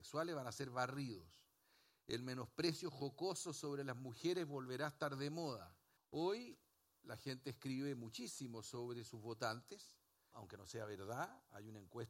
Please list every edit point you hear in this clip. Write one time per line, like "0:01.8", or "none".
0:06.0
0:10.3